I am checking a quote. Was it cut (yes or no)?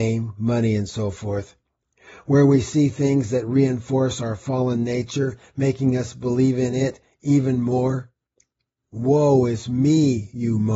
no